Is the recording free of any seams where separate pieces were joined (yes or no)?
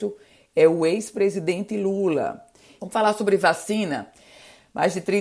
no